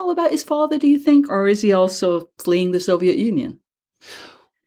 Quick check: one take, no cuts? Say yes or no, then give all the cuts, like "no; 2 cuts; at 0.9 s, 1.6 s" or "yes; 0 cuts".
no; 1 cut; at 1.3 s